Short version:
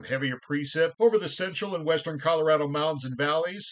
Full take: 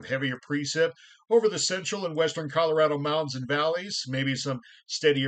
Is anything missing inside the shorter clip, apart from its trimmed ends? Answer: yes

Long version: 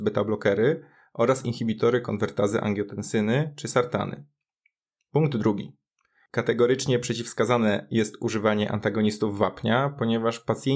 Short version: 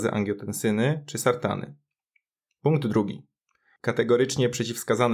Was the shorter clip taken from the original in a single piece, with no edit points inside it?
yes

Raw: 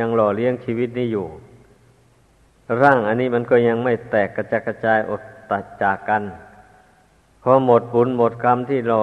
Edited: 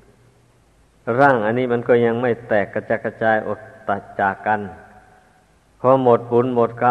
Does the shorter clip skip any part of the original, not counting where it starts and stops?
no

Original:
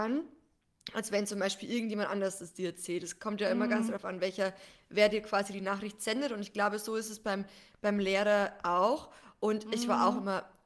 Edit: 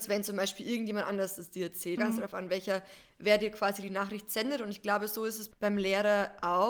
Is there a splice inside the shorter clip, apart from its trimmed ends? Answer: yes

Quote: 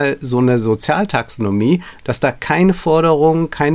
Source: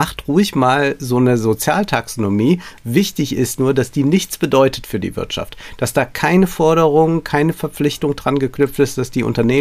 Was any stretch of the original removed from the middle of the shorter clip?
yes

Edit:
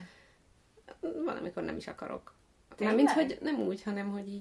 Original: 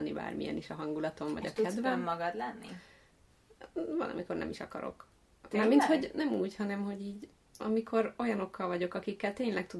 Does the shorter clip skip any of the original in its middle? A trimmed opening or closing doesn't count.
no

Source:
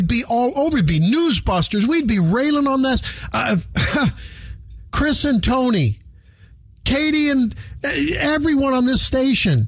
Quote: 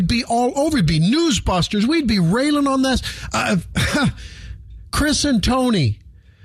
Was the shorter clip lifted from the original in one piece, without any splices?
yes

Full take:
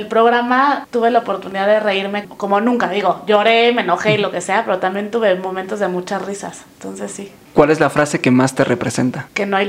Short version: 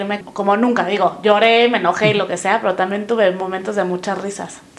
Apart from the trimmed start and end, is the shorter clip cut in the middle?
no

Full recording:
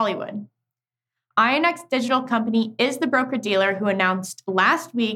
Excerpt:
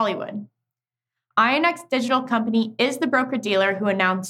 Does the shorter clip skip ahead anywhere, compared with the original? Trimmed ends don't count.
no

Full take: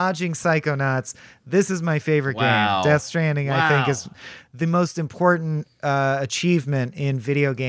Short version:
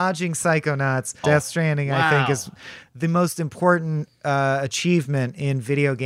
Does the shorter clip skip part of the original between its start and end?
yes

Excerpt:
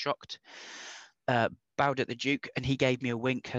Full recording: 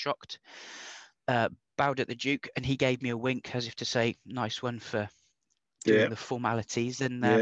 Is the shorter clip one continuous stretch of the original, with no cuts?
yes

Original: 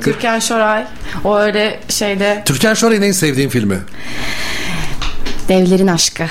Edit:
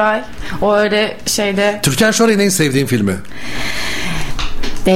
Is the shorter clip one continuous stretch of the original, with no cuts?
yes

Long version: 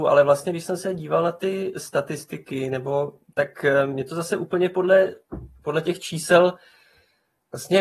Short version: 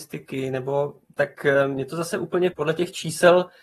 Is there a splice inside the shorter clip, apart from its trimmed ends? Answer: yes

